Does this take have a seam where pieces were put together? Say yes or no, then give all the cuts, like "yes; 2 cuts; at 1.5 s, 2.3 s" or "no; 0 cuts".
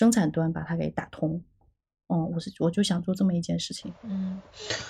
no; 0 cuts